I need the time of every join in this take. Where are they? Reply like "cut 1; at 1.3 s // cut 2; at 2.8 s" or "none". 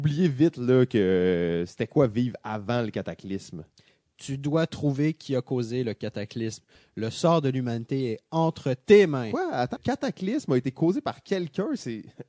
cut 1; at 9.8 s